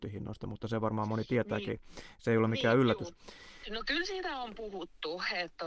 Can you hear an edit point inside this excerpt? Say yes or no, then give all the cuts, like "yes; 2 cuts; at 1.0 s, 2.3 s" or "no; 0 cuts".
yes; 1 cut; at 3.6 s